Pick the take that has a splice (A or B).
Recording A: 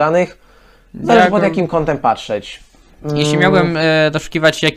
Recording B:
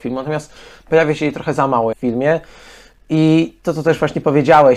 B